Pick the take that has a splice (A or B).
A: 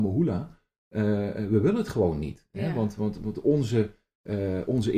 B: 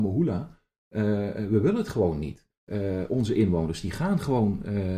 B